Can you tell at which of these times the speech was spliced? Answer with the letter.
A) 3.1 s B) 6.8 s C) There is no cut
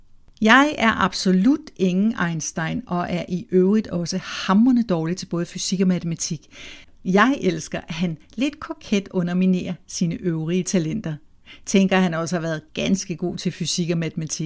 B